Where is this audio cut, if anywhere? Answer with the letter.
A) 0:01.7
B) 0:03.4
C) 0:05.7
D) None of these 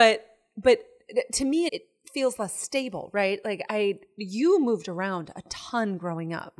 A